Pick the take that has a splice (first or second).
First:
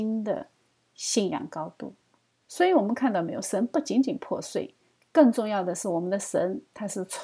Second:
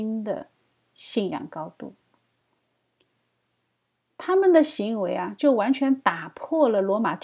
first